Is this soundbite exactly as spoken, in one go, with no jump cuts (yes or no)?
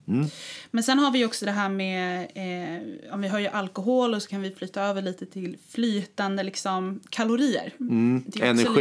yes